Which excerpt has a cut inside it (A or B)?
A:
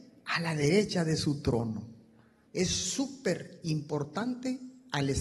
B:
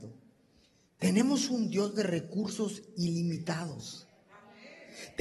A